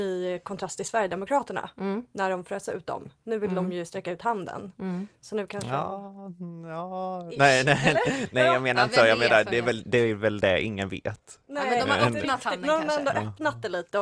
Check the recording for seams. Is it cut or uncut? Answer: uncut